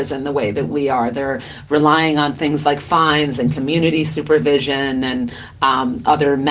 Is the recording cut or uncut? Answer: uncut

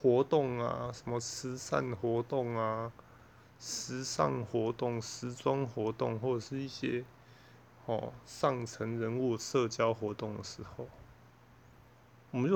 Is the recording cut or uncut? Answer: uncut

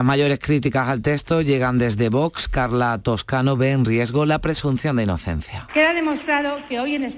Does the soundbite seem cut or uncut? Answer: cut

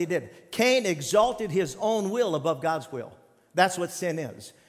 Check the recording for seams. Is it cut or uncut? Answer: uncut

